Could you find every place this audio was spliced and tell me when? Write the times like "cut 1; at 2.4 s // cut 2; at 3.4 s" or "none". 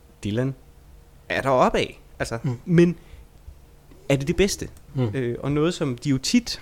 cut 1; at 2.6 s // cut 2; at 4.9 s